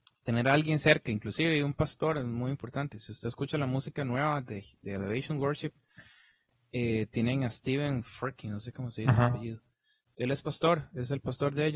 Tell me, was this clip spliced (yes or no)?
no